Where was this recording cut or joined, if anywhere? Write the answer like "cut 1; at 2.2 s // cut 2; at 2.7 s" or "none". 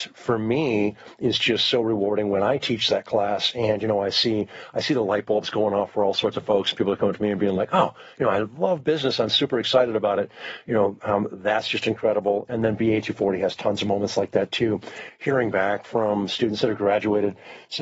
none